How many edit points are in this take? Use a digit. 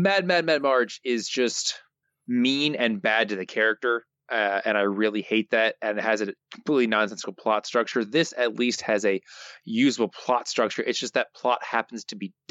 0